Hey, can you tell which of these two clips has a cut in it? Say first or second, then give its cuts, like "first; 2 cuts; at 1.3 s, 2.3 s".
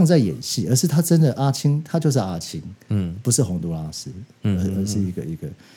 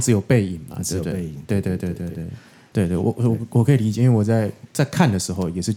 second; 1 cut; at 2.7 s